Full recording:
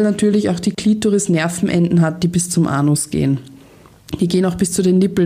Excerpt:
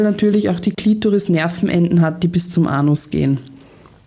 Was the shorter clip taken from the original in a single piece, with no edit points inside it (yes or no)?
yes